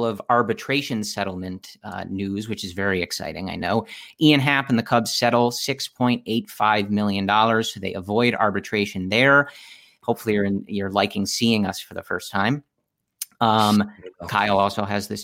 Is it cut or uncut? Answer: cut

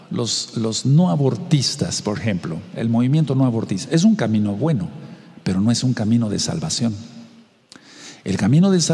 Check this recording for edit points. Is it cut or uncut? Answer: uncut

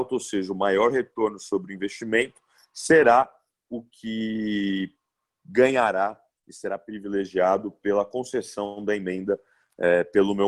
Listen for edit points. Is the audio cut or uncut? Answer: uncut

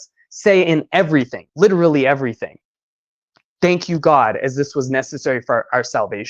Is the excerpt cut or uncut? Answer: cut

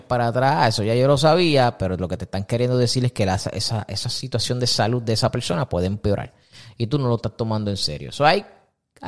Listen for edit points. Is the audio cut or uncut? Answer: uncut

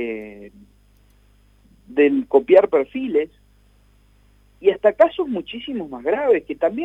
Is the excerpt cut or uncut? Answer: uncut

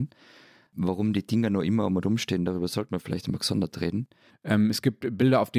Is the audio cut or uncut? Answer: cut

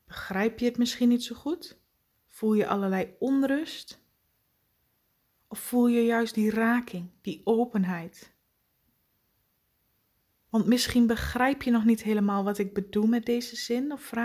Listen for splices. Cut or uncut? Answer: uncut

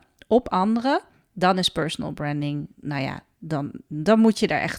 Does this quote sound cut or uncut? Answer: uncut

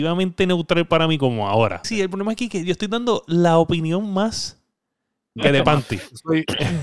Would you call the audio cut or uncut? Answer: cut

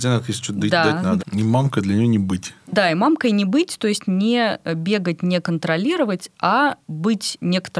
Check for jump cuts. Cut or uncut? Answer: cut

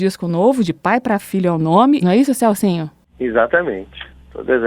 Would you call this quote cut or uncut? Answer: cut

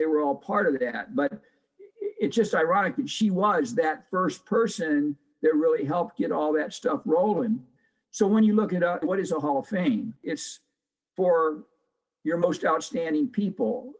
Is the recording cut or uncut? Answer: cut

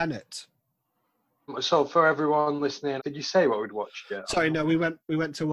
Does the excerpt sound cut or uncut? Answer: cut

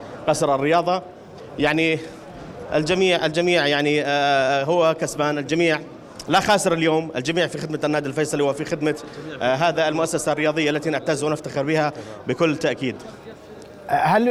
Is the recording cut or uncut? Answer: uncut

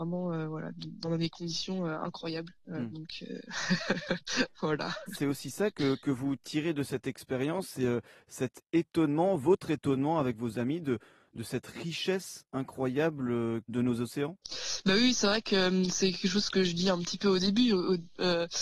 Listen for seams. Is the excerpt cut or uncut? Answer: uncut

